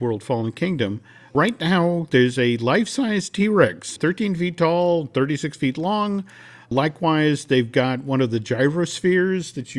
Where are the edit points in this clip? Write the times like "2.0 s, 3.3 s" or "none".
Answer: none